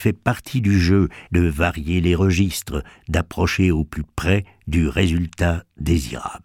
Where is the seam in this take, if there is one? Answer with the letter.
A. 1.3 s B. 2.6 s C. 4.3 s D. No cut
A